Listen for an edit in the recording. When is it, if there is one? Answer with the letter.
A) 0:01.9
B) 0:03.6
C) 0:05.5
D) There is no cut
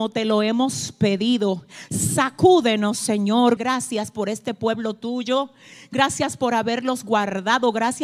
B